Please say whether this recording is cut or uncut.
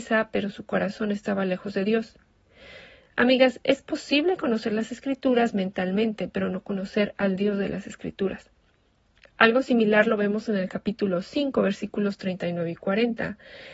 uncut